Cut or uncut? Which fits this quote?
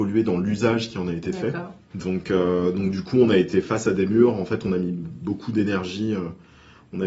cut